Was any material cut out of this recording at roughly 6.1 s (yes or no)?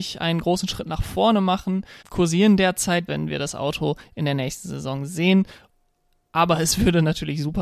no